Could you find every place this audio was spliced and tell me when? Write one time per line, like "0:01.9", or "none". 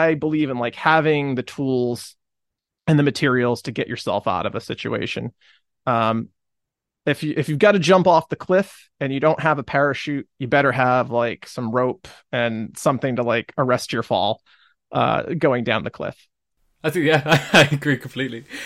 none